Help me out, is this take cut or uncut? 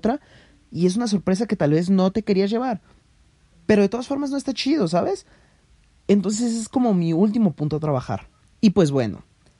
cut